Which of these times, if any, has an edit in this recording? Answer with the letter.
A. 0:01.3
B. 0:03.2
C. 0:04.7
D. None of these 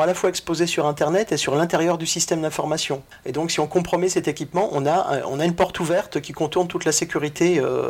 D